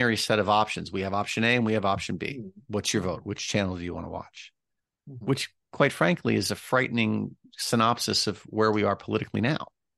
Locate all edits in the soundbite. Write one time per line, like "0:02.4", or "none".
none